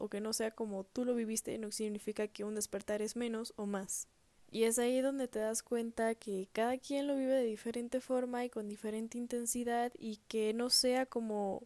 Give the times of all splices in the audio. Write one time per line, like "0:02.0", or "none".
0:04.4